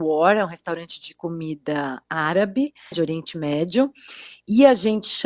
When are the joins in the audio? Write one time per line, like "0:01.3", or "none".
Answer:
0:02.9